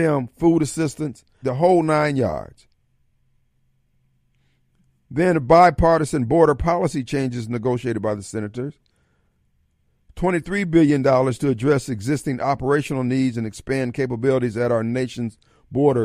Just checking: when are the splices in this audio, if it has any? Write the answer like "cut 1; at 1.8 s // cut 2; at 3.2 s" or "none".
cut 1; at 1.4 s